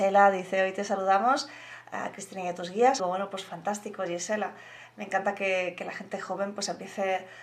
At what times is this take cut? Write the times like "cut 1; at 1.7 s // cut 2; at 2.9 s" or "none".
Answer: cut 1; at 3.0 s